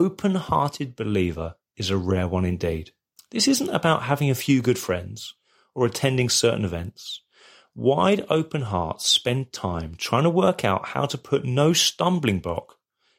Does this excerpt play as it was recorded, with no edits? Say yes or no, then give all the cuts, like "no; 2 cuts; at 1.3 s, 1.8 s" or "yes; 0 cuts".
no; 1 cut; at 3.2 s